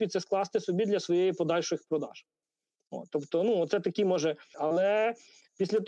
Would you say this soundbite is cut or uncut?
cut